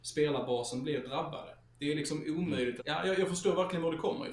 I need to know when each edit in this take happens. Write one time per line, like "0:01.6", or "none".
0:01.6
0:02.8